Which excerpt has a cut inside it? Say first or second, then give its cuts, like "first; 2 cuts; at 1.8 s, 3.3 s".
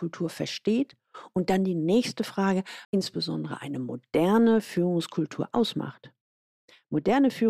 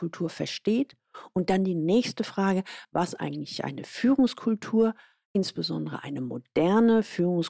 first; 1 cut; at 2.8 s